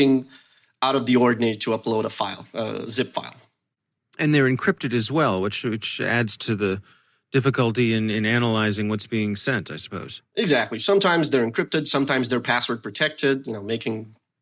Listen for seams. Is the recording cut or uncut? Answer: uncut